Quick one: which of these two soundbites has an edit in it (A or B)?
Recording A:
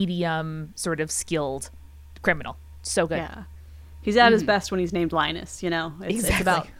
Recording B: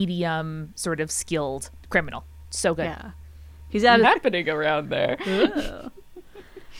B